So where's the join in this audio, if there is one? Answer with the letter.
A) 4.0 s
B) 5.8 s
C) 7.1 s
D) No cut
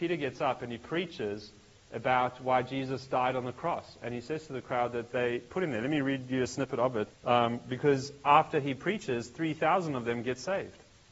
C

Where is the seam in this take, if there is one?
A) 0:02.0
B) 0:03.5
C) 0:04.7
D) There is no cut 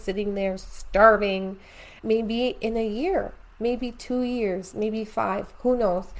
A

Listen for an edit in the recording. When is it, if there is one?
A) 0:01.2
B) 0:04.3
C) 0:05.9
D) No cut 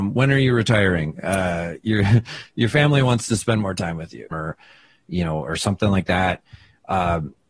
B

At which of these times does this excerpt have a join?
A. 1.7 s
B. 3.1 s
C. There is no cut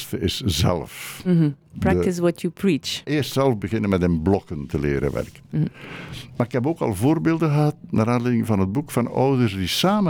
B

